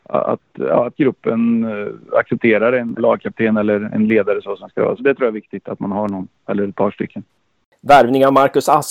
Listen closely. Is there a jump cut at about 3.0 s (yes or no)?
yes